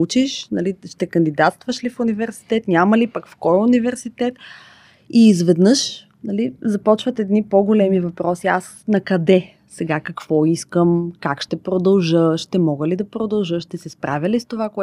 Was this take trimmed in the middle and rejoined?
no; 0 cuts

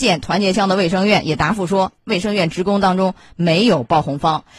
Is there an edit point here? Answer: yes; 1 cut; at 2.0 s

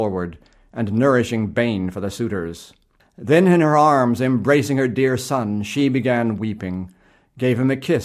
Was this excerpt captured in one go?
no; 1 cut; at 3.0 s

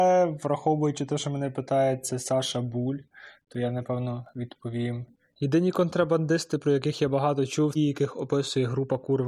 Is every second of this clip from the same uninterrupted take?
no; 2 cuts; at 5.3 s, 7.7 s

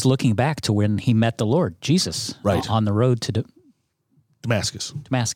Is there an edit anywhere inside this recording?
no; 0 cuts

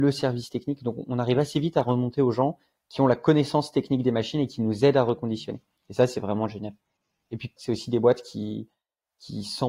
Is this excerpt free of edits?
no; 1 cut; at 7.6 s

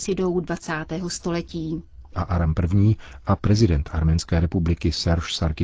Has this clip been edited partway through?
yes; 1 cut; at 2.1 s

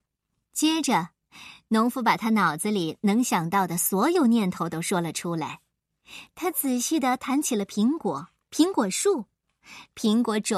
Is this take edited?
no; 0 cuts

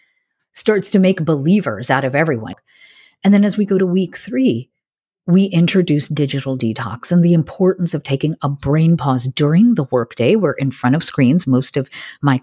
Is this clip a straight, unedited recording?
yes; 0 cuts

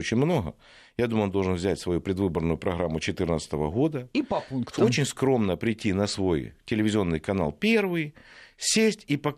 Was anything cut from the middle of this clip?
no; 0 cuts

